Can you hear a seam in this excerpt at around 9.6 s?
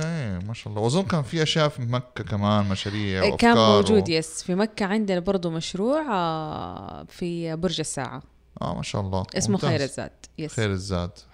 no; 0 cuts

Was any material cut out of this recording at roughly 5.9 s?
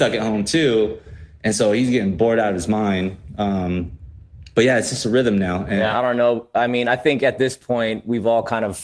yes; 1 cut; at 5.9 s

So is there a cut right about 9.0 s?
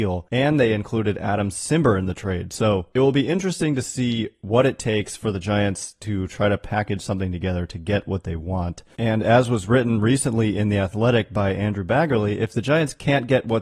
yes; 1 cut; at 9.0 s

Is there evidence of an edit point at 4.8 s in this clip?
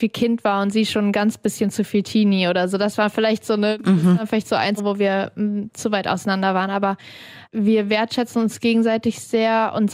yes; 1 cut; at 4.8 s

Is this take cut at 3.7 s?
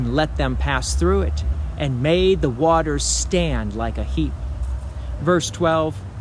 no; 1 cut; at 5.2 s

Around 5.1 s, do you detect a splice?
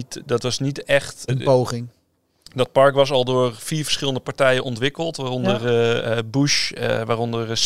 no; 1 cut; at 1.3 s

